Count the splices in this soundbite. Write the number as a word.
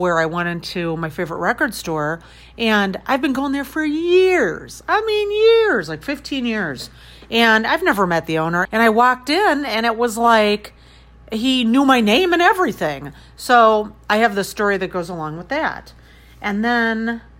one